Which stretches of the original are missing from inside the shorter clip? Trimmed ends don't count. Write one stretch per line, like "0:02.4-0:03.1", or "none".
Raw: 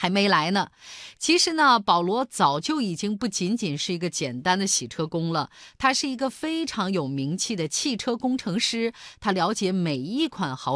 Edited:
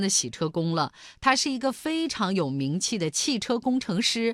none